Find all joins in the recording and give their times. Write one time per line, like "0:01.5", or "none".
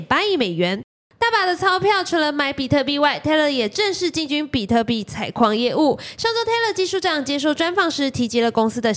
none